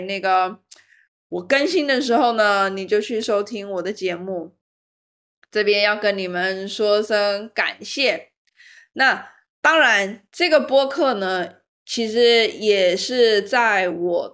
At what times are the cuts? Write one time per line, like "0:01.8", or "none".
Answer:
none